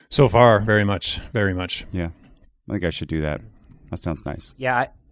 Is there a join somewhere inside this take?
no; 0 cuts

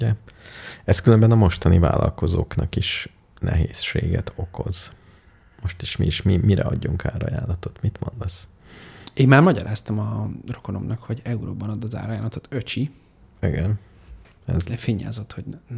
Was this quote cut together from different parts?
no; 0 cuts

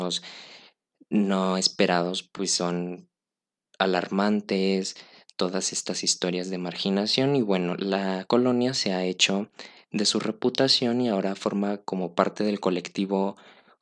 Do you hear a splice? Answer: no; 0 cuts

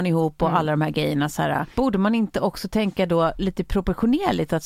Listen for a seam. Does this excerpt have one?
no; 0 cuts

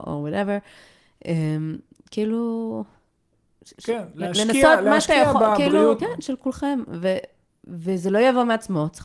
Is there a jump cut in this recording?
yes; 1 cut; at 6.0 s

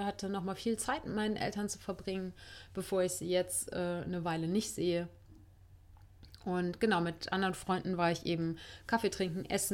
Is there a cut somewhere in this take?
no; 0 cuts

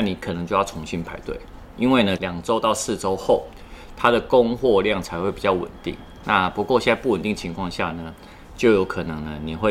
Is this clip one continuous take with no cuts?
no; 1 cut; at 2.2 s

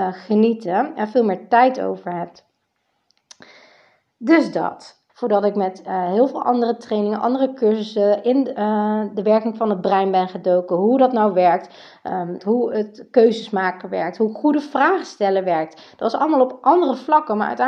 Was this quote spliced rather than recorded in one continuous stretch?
yes; 2 cuts; at 5.1 s, 12.4 s

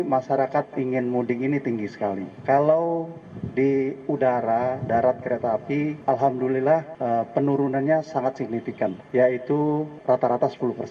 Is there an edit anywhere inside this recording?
no; 0 cuts

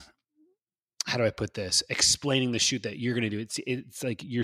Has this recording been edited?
no; 0 cuts

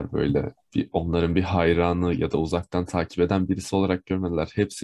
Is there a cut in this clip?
no; 0 cuts

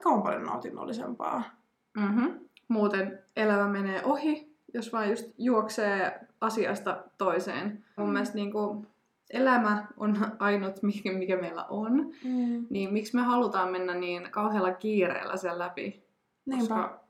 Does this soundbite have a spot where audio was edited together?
yes; 1 cut; at 8.0 s

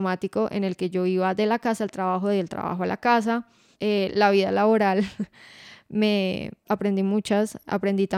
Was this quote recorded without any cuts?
no; 2 cuts; at 3.7 s, 6.7 s

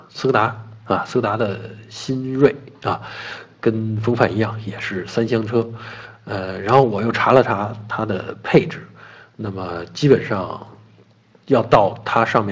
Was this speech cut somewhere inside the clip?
no; 0 cuts

